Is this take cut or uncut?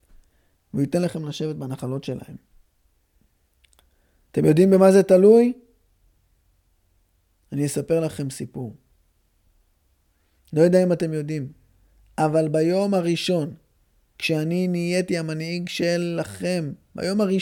uncut